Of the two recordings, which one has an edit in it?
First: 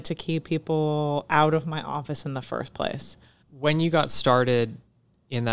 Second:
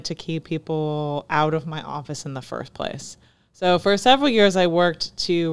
first; 1 cut; at 3.4 s

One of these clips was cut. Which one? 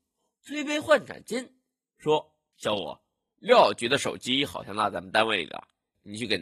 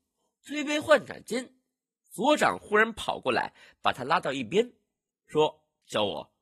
first; 1 cut; at 1.9 s

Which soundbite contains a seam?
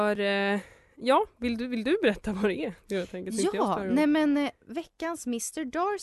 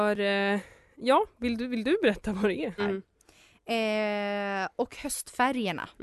second; 1 cut; at 2.8 s

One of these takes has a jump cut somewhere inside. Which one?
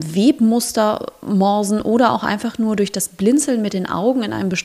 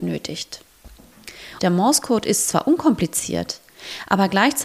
second; 1 cut; at 1.6 s

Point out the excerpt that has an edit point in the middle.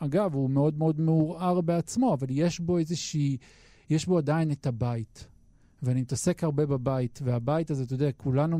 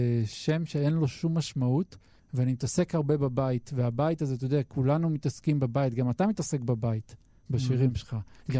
second; 1 cut; at 2.2 s

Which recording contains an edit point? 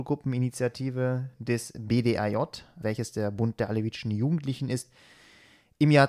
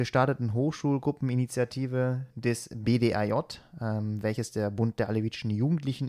first; 1 cut; at 2.8 s

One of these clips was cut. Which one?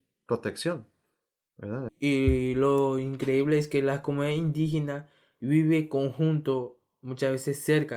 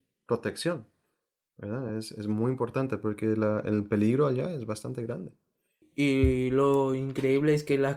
first; 1 cut; at 1.9 s

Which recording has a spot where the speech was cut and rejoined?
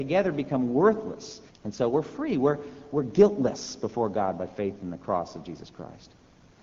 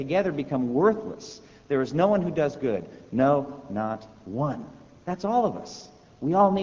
first; 1 cut; at 1.5 s

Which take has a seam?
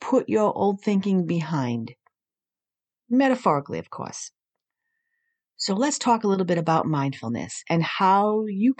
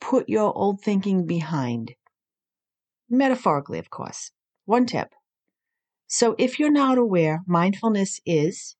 second; 1 cut; at 4.6 s

